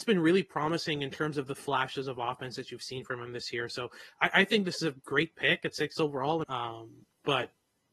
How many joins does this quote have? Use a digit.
1